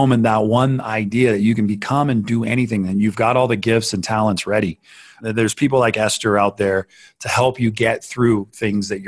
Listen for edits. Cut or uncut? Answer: uncut